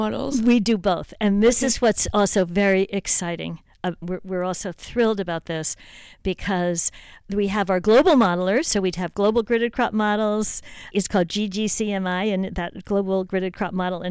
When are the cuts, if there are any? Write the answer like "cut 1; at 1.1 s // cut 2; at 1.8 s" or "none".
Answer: cut 1; at 4.0 s // cut 2; at 10.9 s